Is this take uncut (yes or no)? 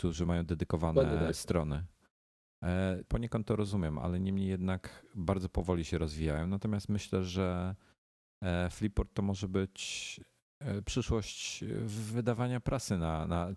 no